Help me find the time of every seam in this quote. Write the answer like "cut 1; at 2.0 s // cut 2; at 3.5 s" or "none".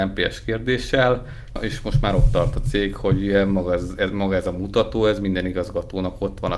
none